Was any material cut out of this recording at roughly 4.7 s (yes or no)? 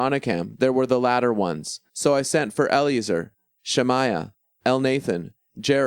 no